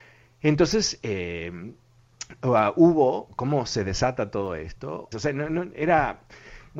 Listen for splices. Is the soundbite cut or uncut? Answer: cut